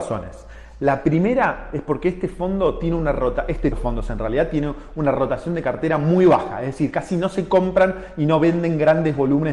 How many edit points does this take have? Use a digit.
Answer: 1